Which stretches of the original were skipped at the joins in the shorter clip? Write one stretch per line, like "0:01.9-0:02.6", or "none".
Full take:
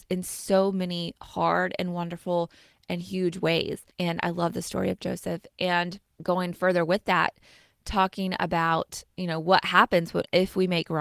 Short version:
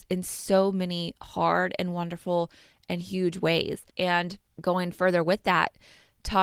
0:03.9-0:05.5